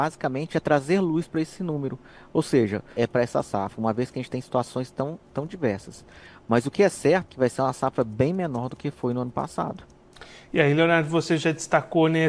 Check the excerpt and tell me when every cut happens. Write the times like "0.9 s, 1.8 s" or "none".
3.0 s, 7.3 s